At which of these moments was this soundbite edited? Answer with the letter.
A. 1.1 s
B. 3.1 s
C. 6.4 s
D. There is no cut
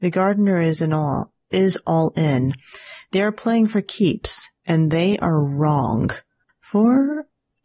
C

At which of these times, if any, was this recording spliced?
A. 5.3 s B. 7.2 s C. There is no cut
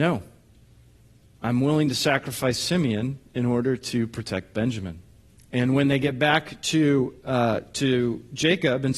A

